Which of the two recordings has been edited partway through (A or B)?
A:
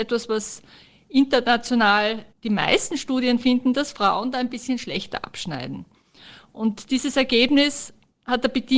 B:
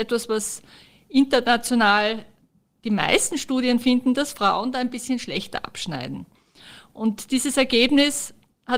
A